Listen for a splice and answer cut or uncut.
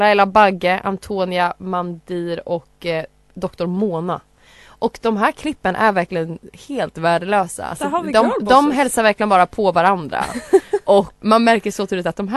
cut